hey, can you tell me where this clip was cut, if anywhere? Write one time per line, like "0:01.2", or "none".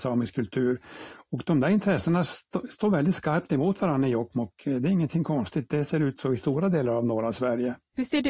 none

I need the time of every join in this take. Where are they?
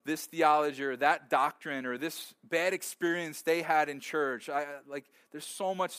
none

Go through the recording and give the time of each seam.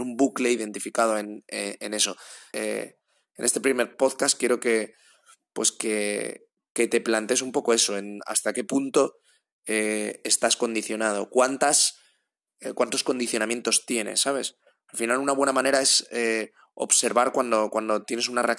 0:02.5
0:06.7

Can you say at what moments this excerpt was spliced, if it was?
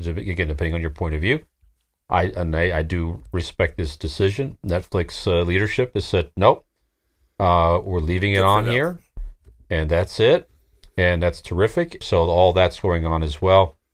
0:12.0

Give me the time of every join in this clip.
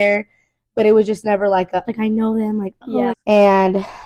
0:01.8
0:03.1

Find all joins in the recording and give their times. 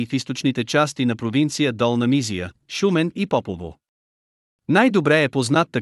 0:02.6

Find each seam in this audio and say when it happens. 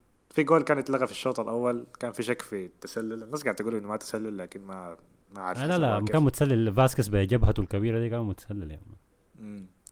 none

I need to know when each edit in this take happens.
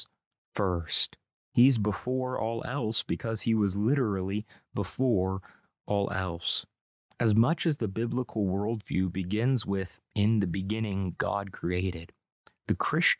none

